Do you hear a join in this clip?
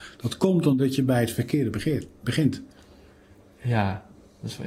no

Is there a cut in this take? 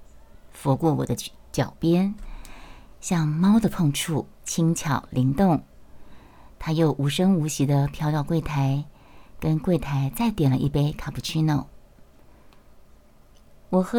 yes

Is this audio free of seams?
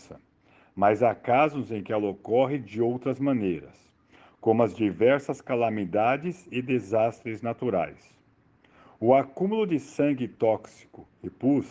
yes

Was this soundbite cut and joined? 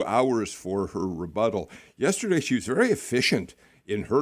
no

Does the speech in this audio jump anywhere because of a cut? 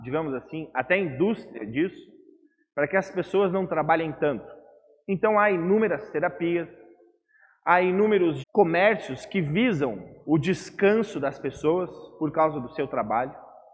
yes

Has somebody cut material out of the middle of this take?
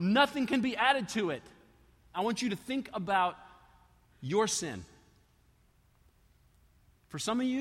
yes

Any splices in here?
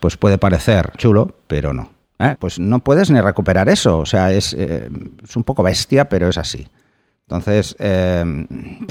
yes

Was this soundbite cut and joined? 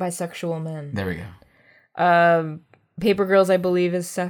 no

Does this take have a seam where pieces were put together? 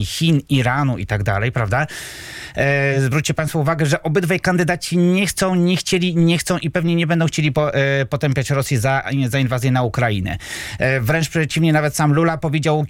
no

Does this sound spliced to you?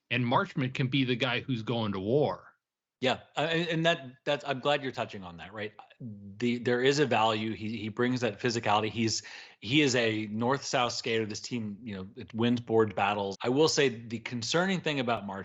yes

